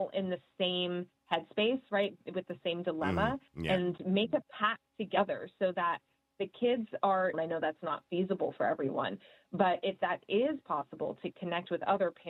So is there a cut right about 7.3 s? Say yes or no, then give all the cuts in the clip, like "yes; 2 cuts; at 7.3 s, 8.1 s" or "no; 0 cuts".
yes; 2 cuts; at 4.9 s, 7.3 s